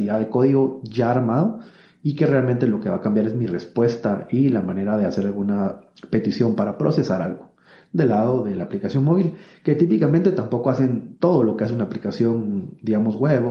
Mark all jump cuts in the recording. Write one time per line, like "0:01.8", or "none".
none

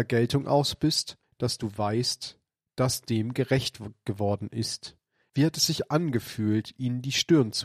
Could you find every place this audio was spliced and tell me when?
0:01.2
0:05.3

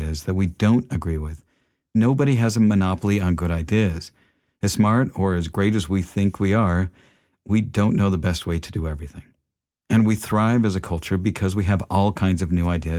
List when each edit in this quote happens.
0:01.9

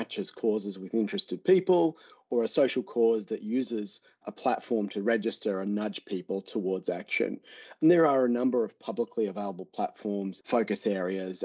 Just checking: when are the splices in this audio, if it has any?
0:10.4

